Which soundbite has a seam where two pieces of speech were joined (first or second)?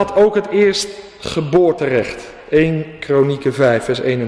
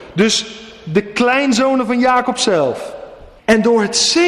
second